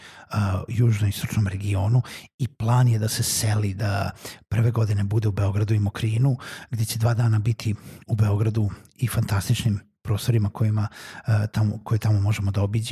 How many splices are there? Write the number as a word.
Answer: zero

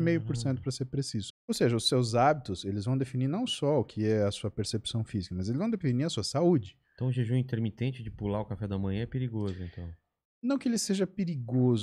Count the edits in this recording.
one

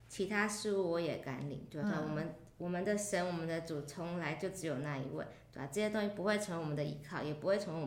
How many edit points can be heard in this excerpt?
one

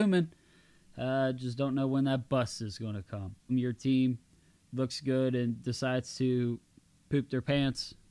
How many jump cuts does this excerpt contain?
one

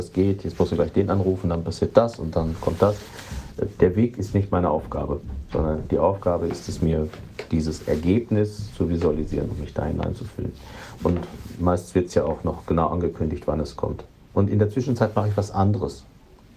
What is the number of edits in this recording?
one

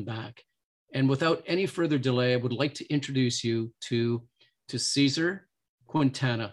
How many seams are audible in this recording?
zero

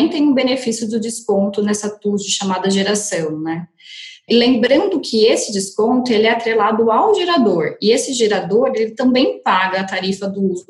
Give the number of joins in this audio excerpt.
one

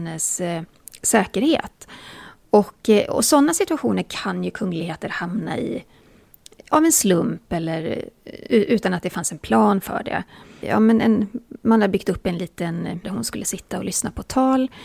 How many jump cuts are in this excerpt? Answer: two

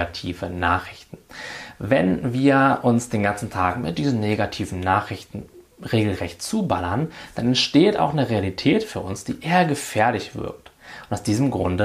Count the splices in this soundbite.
zero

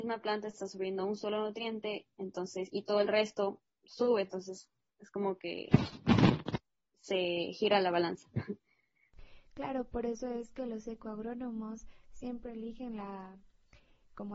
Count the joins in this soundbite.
zero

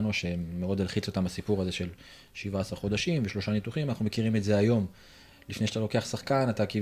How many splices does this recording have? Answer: zero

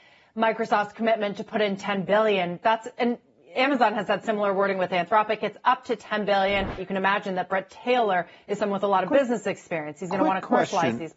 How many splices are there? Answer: one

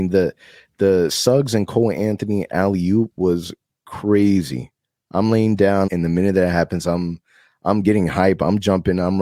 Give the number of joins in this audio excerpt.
one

